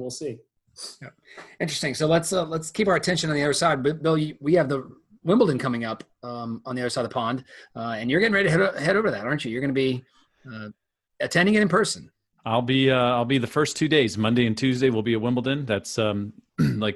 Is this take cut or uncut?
uncut